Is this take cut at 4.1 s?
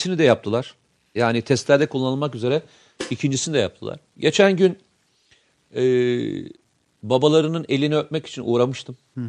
yes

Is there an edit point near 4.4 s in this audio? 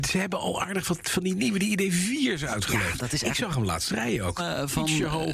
yes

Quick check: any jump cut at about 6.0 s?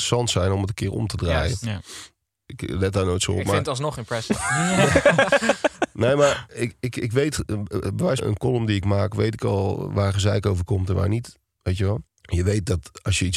no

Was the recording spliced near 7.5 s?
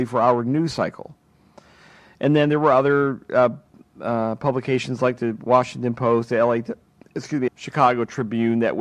yes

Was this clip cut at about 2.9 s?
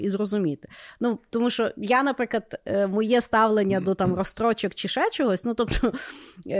no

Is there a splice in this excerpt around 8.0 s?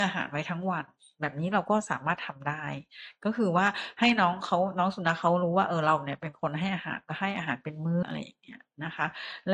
yes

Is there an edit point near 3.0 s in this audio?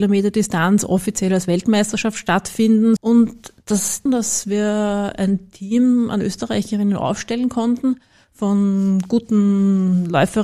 yes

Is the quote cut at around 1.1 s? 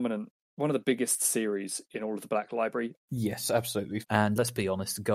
no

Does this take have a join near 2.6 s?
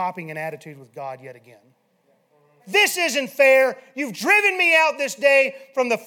yes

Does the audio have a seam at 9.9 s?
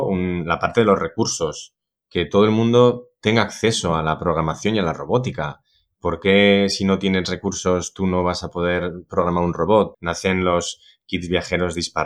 yes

